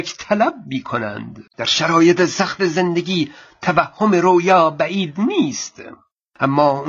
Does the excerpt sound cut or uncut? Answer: cut